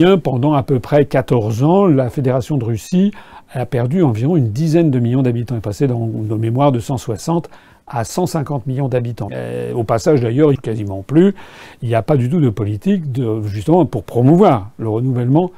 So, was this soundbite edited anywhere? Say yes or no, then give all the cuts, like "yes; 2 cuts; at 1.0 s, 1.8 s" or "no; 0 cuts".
yes; 2 cuts; at 9.3 s, 10.6 s